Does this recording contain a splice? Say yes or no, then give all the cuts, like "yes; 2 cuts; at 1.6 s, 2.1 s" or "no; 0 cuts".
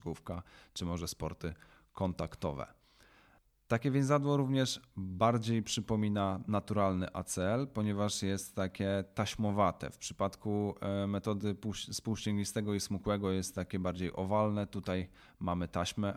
no; 0 cuts